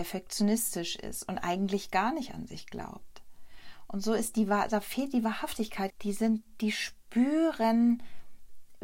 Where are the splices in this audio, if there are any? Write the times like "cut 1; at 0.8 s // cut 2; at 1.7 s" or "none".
cut 1; at 5.9 s

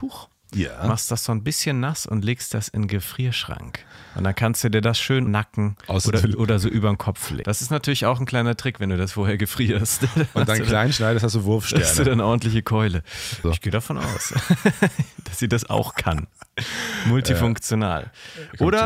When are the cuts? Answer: cut 1; at 5.3 s // cut 2; at 7.4 s // cut 3; at 13.4 s

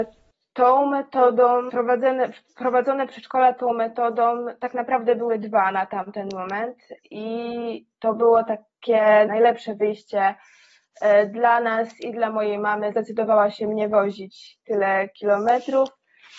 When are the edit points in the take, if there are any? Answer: cut 1; at 1.7 s // cut 2; at 9.3 s // cut 3; at 12.9 s

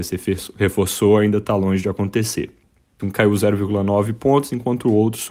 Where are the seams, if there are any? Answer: cut 1; at 3.0 s

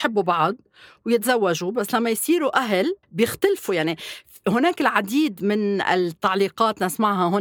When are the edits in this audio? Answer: cut 1; at 3.0 s

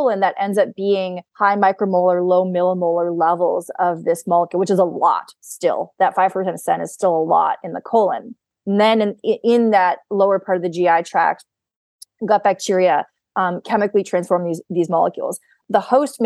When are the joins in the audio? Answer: cut 1; at 1.3 s

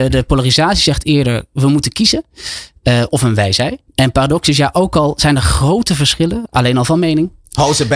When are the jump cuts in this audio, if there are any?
cut 1; at 3.9 s

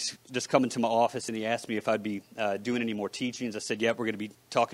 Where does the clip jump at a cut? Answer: none

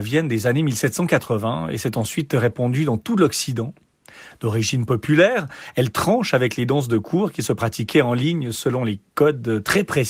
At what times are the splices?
none

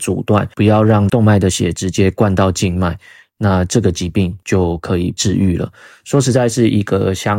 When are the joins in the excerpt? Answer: none

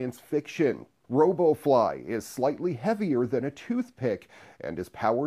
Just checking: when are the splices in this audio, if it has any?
cut 1; at 1.0 s

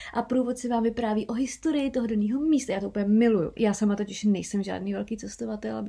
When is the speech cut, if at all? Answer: cut 1; at 3.6 s

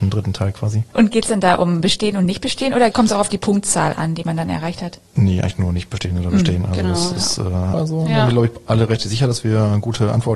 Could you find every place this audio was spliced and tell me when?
cut 1; at 7.7 s

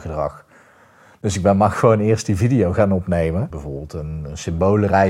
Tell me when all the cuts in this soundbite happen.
cut 1; at 3.5 s

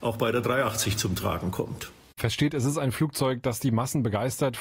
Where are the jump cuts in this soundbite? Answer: cut 1; at 2.2 s

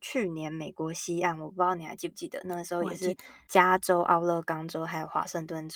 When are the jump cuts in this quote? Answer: none

